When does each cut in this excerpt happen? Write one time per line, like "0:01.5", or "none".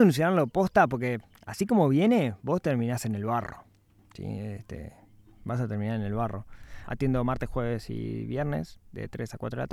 0:06.9